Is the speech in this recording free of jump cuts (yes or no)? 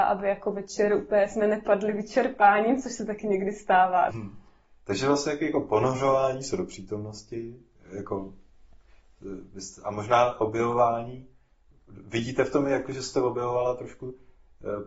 no